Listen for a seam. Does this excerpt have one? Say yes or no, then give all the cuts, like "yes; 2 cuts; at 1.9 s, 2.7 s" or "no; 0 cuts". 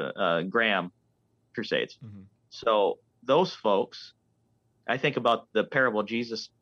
no; 0 cuts